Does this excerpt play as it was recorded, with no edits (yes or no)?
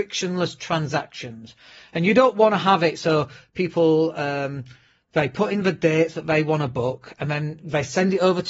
yes